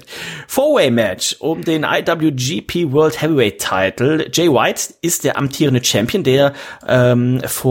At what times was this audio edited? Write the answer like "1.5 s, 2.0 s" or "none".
none